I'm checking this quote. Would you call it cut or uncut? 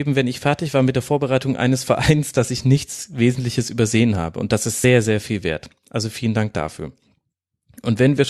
uncut